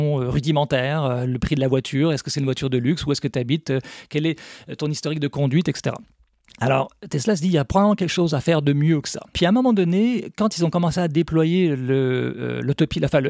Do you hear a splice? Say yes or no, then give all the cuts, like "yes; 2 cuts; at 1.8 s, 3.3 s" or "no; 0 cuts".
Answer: yes; 1 cut; at 9.3 s